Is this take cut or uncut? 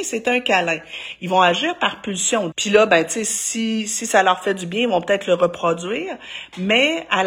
cut